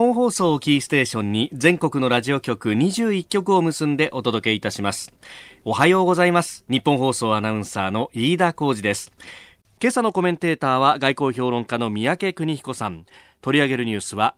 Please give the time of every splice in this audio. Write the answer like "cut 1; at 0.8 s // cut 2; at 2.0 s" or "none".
none